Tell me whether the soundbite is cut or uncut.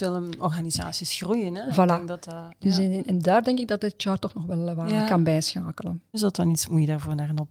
cut